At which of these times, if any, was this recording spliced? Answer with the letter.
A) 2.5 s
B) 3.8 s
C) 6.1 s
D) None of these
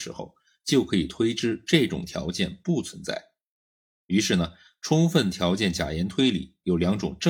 D